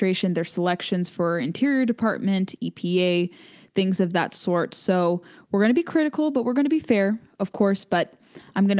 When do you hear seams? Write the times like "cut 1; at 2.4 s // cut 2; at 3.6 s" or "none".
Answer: none